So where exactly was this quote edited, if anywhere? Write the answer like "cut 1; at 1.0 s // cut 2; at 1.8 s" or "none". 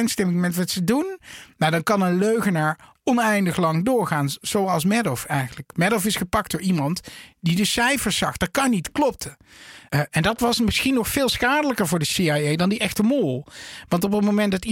cut 1; at 9.9 s